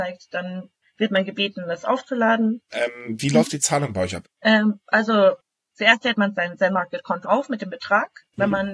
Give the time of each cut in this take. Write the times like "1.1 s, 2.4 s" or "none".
2.7 s, 4.2 s, 7.2 s